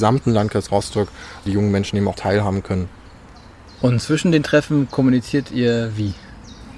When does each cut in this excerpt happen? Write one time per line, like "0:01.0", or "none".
0:02.1